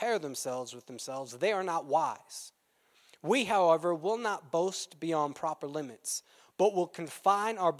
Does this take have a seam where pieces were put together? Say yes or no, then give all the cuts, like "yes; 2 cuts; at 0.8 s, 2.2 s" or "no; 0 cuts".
no; 0 cuts